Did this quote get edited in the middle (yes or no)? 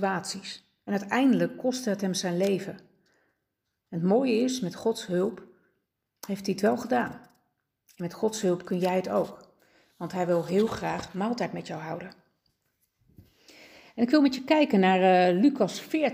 no